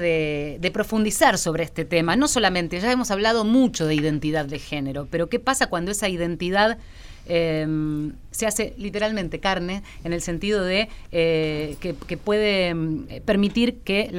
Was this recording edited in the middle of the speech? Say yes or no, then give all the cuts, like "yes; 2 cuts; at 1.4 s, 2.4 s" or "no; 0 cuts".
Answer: no; 0 cuts